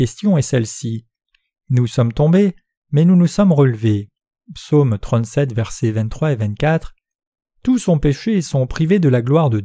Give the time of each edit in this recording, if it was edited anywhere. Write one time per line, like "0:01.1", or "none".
none